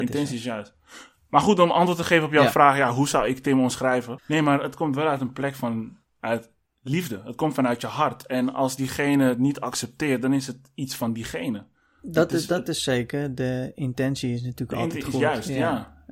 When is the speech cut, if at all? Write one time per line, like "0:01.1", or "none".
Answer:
0:04.2